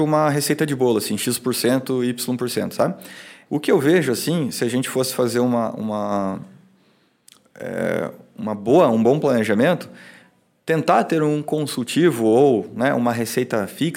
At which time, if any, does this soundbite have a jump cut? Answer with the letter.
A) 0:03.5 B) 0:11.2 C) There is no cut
A